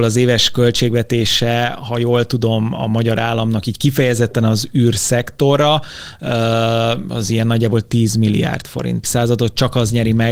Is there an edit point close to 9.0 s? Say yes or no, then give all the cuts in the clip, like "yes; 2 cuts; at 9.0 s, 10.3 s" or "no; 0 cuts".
yes; 1 cut; at 9.0 s